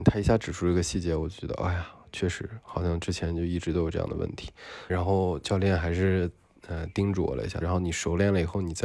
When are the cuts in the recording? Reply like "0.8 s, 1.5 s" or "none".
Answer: 4.9 s, 7.6 s